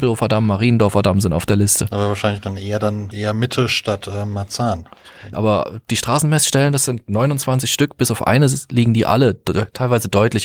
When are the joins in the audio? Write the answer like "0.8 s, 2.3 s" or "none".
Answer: 3.1 s, 5.3 s